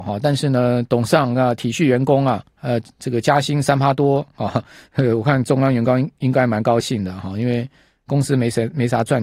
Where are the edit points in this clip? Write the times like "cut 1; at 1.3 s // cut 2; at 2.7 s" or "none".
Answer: none